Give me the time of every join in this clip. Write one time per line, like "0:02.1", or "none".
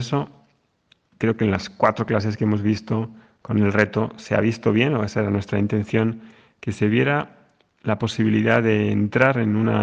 0:01.1